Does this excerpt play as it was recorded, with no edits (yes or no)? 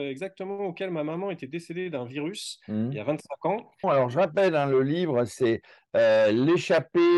no